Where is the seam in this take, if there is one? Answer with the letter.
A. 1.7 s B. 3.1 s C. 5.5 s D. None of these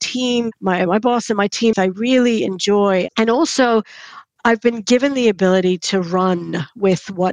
A